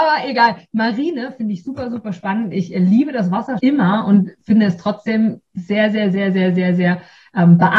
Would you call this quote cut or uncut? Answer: cut